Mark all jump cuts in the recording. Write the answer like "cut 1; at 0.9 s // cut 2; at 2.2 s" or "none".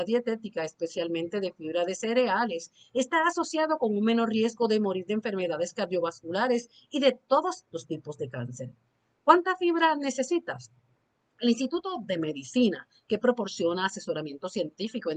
none